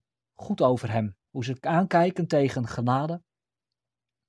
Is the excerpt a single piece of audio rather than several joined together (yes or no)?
no